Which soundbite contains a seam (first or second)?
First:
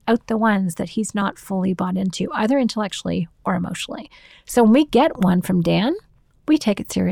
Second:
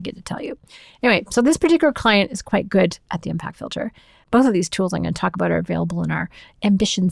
second